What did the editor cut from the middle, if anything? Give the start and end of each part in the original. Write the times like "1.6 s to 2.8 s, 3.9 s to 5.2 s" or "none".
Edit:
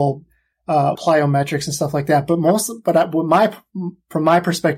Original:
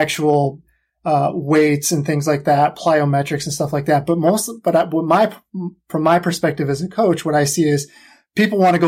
1.3 s to 2.7 s